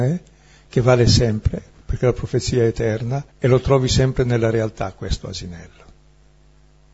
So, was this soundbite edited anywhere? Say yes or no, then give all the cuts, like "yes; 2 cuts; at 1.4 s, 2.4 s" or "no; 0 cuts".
yes; 1 cut; at 3.3 s